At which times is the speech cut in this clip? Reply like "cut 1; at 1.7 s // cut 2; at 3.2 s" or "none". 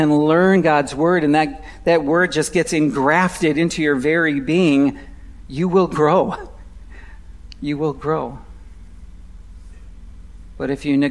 none